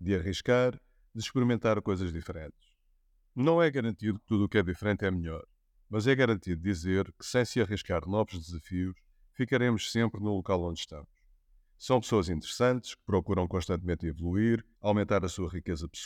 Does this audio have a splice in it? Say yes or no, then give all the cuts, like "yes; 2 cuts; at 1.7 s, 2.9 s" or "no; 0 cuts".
yes; 2 cuts; at 11.7 s, 14.7 s